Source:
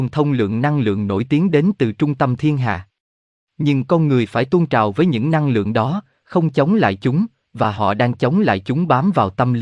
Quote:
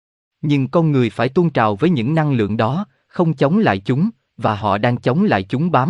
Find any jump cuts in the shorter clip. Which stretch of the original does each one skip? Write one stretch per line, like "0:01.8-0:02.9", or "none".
none